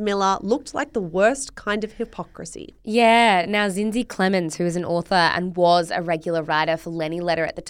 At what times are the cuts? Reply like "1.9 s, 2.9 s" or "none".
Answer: none